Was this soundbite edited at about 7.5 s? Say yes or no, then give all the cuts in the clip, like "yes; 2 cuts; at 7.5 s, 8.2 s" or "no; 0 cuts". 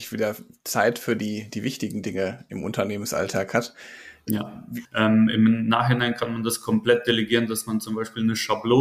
no; 1 cut; at 4.8 s